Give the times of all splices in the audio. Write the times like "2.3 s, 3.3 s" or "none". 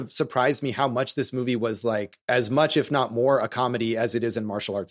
2.2 s